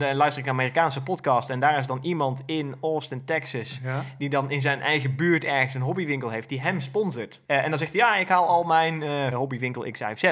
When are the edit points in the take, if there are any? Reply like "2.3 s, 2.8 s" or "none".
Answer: 7.4 s, 9.3 s